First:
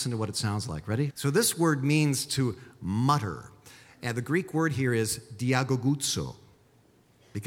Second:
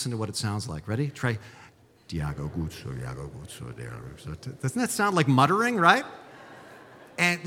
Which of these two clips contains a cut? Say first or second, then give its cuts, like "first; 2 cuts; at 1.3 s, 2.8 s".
first; 1 cut; at 1.1 s